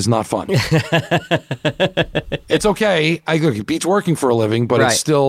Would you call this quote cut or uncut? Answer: uncut